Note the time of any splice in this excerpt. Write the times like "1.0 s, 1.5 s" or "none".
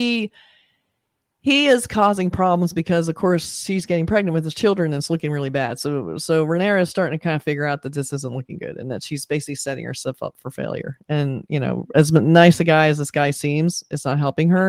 none

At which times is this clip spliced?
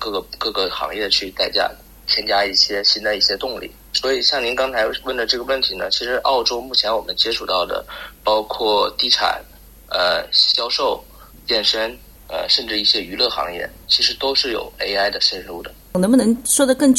11.3 s

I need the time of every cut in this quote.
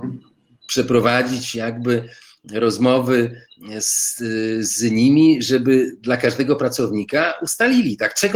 none

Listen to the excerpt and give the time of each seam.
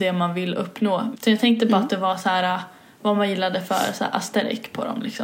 1.1 s

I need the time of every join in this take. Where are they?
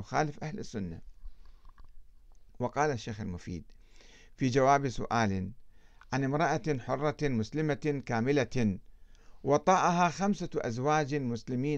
2.5 s

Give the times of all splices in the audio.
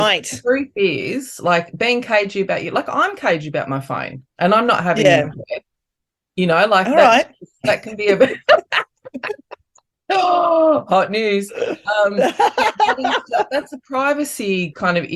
none

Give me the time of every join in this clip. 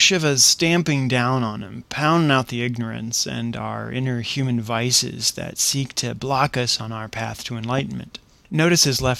none

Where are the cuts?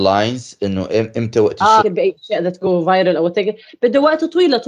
1.8 s

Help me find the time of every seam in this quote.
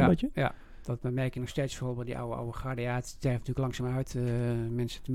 none

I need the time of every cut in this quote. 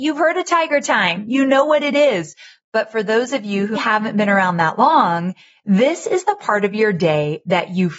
3.8 s

